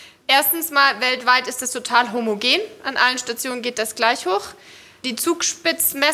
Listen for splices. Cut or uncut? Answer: uncut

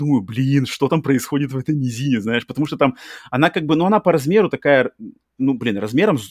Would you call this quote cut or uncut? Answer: uncut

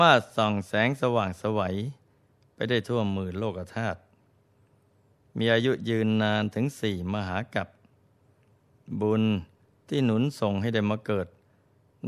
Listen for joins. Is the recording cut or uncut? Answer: uncut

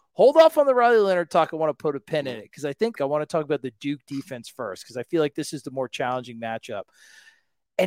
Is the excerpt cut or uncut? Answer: cut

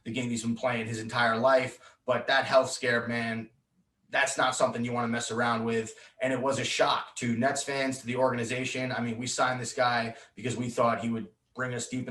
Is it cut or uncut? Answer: uncut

